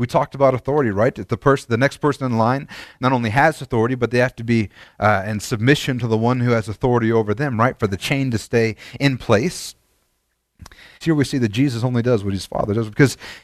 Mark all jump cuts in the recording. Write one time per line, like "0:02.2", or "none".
0:11.0